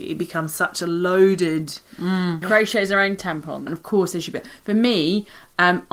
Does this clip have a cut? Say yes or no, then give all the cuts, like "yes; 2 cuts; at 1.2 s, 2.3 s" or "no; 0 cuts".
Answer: yes; 2 cuts; at 2.4 s, 3.7 s